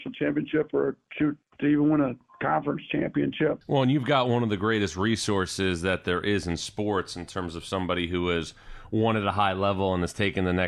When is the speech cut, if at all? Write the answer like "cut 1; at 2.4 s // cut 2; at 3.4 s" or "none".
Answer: cut 1; at 3.6 s